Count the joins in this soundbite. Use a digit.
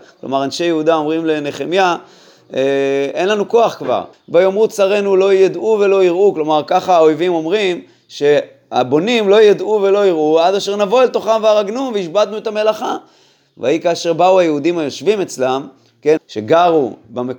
2